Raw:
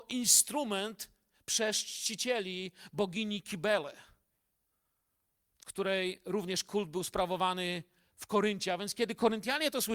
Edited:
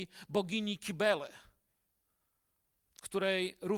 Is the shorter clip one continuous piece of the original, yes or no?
yes